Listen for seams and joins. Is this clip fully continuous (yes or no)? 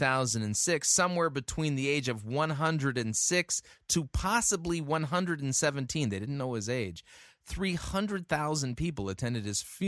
yes